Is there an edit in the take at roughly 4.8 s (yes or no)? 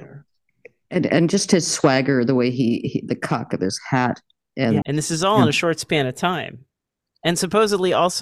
yes